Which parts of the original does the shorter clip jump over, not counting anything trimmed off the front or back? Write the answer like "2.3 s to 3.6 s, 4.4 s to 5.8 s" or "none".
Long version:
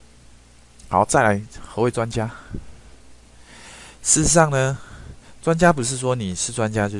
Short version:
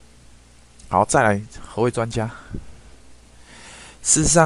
none